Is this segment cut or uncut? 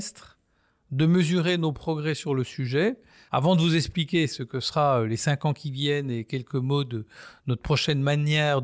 cut